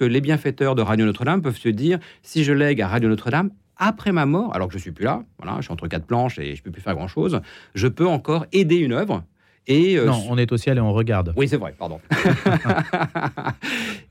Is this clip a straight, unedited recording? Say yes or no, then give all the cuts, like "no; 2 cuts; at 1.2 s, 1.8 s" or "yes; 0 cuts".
yes; 0 cuts